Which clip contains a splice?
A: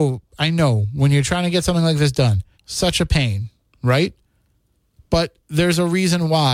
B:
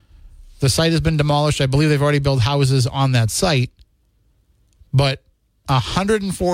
A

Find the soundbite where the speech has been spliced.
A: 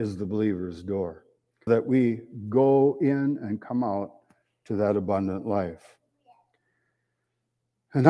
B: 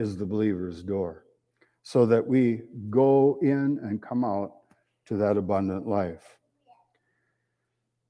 A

